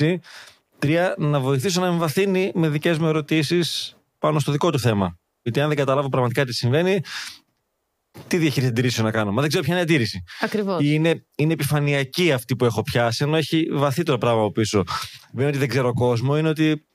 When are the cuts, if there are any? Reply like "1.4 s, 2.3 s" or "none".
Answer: none